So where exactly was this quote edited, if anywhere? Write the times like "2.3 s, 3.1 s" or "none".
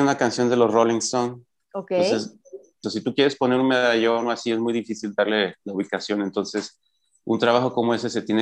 2.8 s